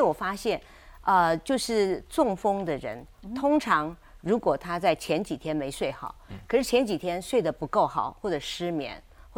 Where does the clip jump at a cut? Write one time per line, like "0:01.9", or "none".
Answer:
0:06.3